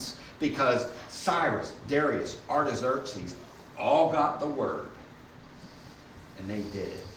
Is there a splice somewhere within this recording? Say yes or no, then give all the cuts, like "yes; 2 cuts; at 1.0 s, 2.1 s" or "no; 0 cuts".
no; 0 cuts